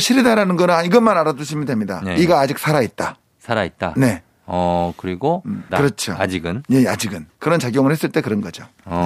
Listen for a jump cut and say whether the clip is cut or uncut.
cut